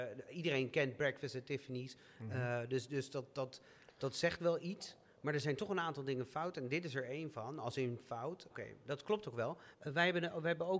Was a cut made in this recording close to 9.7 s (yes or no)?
yes